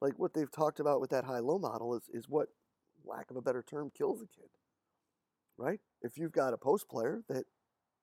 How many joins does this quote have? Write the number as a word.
one